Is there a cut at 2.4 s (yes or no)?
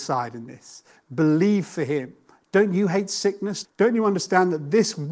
no